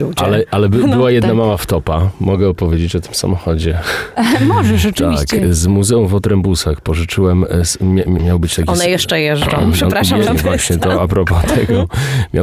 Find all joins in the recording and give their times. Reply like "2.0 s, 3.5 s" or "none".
8.2 s, 10.3 s

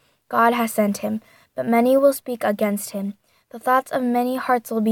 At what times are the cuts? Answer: none

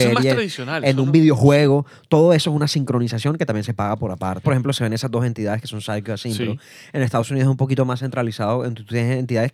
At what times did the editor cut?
4.4 s

